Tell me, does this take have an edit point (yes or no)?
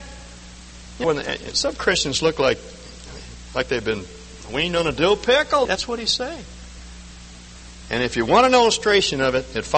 yes